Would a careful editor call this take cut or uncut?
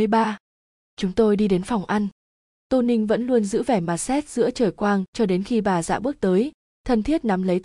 uncut